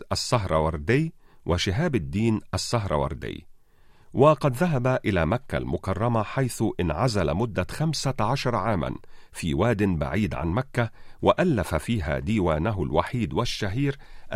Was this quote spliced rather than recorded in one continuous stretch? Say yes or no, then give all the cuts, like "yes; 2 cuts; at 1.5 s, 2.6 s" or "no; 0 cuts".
no; 0 cuts